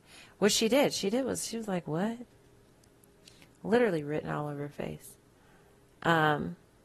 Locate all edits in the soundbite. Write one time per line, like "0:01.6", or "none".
none